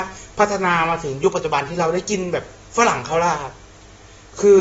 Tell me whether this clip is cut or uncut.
uncut